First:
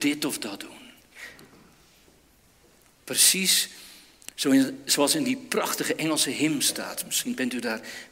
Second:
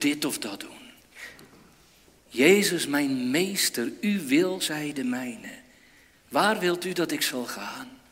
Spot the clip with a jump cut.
second; 1 cut; at 2.2 s

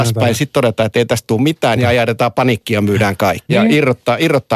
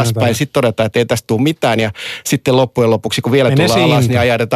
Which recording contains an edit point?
first; 2 cuts; at 1.8 s, 3.5 s

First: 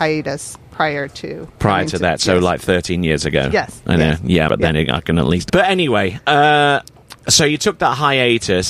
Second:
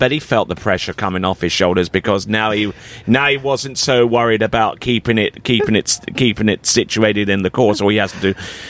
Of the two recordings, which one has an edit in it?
first; 3 cuts; at 4.5 s, 5.5 s, 7.2 s

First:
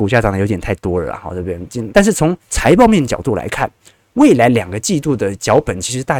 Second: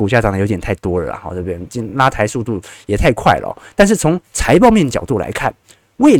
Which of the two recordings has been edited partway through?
first; 1 cut; at 1.9 s

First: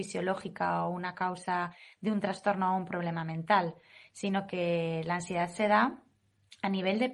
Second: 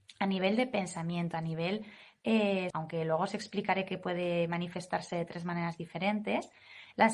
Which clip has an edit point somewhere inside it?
second; 1 cut; at 2.7 s

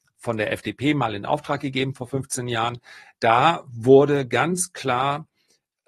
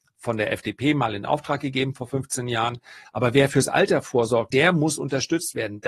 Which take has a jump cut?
second; 2 cuts; at 3.0 s, 4.5 s

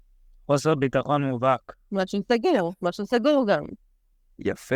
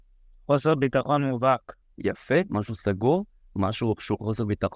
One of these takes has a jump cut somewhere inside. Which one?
second; 1 cut; at 1.8 s

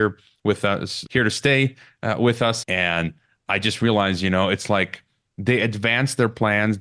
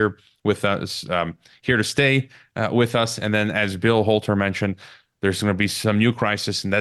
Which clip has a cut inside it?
first; 2 cuts; at 1.1 s, 2.6 s

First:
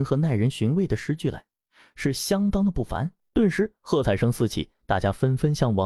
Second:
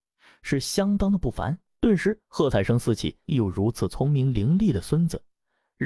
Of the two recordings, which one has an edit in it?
second; 1 cut; at 3.2 s

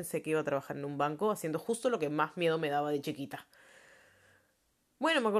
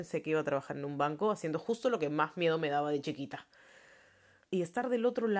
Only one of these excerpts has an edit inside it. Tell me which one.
second; 1 cut; at 4.4 s

